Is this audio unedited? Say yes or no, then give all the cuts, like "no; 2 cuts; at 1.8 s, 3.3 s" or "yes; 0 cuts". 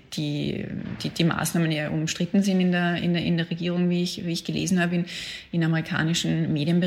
yes; 0 cuts